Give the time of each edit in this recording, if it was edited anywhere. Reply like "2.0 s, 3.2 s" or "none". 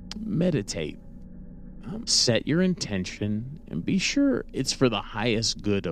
2.0 s